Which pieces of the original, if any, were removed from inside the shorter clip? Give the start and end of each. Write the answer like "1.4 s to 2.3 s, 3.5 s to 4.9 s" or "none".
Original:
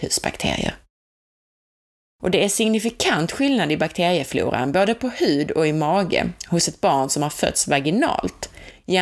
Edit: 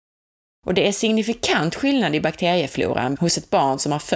4.7 s to 6.5 s